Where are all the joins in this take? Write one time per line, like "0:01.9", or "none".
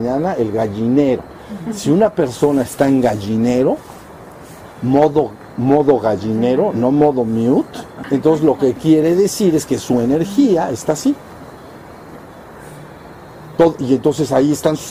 0:08.0